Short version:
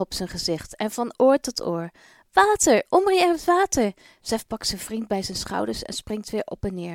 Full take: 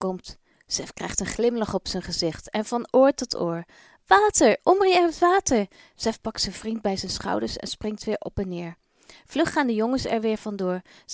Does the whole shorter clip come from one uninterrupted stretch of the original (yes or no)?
yes